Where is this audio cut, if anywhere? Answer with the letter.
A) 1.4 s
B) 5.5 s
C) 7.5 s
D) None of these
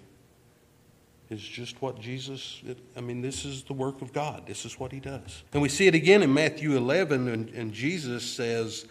B